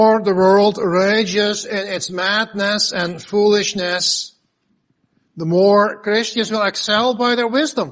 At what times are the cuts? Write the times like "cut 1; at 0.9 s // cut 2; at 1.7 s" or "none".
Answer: none